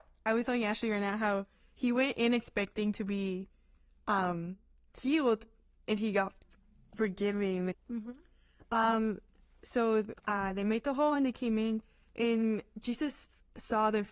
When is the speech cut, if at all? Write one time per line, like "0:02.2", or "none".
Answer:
0:07.7